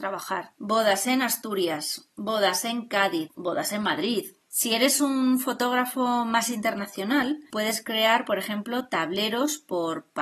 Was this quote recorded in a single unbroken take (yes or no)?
no